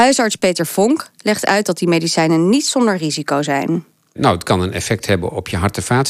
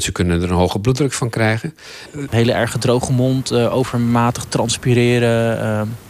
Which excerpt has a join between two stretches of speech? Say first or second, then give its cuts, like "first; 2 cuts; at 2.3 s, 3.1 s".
second; 1 cut; at 2.3 s